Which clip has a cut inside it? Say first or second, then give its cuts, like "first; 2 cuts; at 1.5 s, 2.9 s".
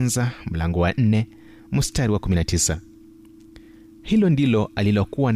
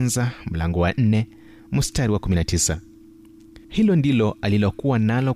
second; 1 cut; at 3.6 s